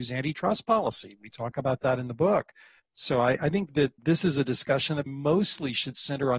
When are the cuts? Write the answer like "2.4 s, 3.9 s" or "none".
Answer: 2.8 s, 4.0 s, 5.1 s